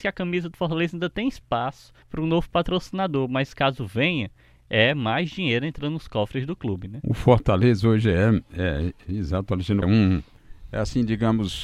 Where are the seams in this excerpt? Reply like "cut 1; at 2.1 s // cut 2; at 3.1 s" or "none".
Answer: cut 1; at 2.0 s // cut 2; at 9.8 s